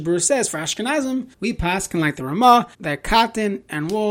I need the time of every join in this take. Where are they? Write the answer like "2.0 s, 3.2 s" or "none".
1.3 s, 2.7 s